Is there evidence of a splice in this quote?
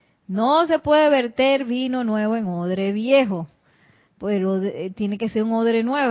no; 0 cuts

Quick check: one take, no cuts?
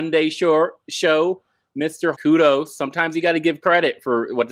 no; 1 cut; at 2.1 s

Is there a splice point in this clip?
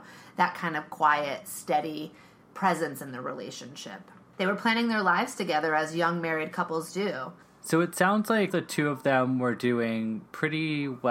yes; 2 cuts; at 4.3 s, 8.5 s

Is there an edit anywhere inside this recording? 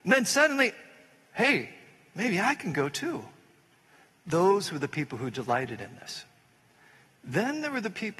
no; 0 cuts

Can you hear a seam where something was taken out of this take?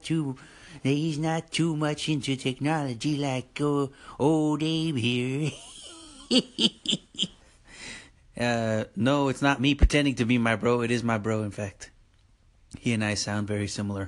yes; 1 cut; at 7.4 s

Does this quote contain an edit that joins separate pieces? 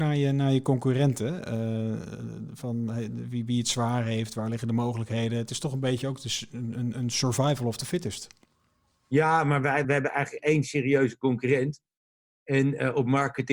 yes; 1 cut; at 9.8 s

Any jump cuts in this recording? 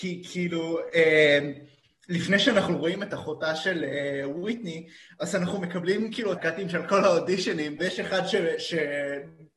yes; 2 cuts; at 6.4 s, 7.8 s

